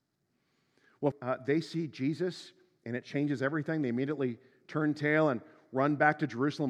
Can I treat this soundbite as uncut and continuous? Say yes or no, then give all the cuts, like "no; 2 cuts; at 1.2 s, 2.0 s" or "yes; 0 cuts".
no; 1 cut; at 1.1 s